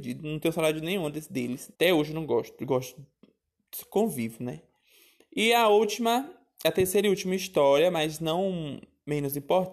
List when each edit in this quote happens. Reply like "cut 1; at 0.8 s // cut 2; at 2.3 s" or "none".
cut 1; at 1.7 s